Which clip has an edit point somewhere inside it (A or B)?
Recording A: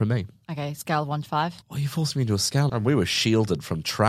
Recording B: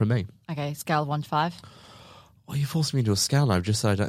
A